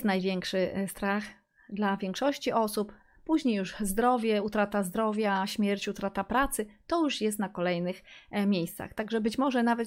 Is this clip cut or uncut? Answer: uncut